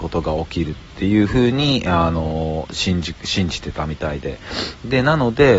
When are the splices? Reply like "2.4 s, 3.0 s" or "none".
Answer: none